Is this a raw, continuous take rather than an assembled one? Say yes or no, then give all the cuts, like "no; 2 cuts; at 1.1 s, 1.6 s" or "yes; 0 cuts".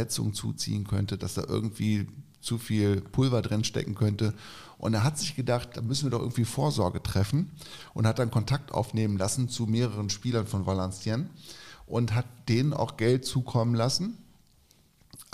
yes; 0 cuts